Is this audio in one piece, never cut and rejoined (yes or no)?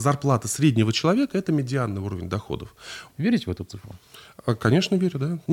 no